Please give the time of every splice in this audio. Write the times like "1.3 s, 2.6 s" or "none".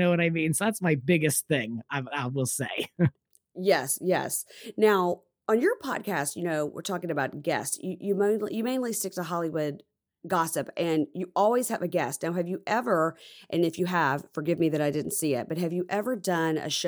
none